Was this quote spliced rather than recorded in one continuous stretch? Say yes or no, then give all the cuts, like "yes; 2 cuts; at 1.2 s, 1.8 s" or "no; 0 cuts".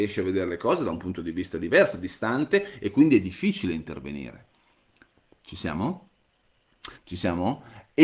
yes; 1 cut; at 6.9 s